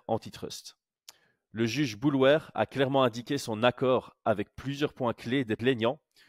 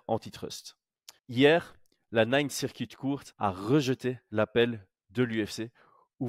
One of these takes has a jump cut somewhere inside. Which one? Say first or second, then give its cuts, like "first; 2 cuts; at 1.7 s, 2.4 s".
second; 2 cuts; at 1.2 s, 3.3 s